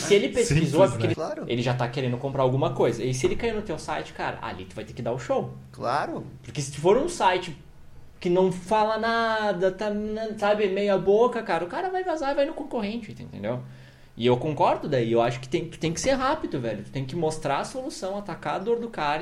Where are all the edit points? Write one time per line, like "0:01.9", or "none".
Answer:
0:01.1